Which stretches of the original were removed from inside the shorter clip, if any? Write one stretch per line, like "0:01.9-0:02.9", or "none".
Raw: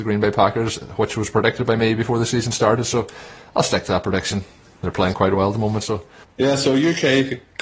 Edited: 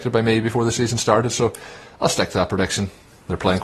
none